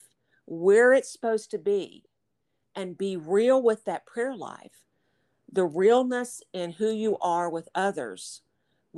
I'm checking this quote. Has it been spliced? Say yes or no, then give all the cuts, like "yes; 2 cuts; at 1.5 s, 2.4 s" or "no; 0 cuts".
no; 0 cuts